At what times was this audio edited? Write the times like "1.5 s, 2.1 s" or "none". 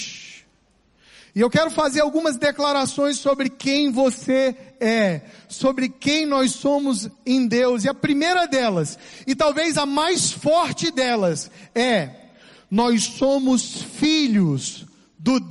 none